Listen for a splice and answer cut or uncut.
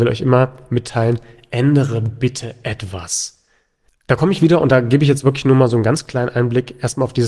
cut